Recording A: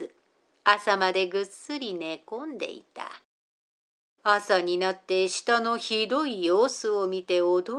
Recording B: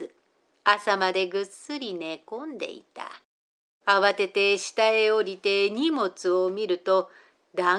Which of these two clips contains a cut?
B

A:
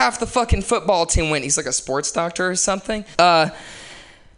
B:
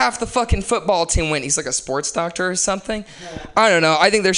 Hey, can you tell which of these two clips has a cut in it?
A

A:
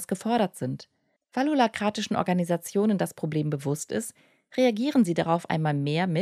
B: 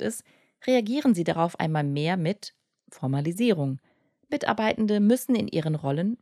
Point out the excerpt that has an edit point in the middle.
A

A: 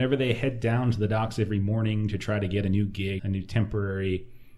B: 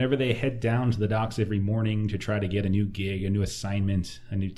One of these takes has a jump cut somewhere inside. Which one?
A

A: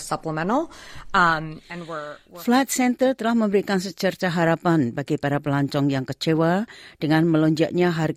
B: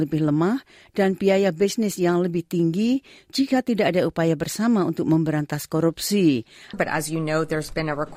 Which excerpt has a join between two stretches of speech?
B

